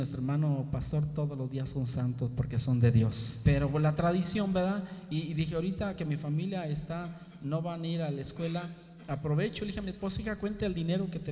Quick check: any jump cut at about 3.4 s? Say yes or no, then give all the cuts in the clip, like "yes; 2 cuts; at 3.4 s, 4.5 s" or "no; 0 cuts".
yes; 1 cut; at 3.4 s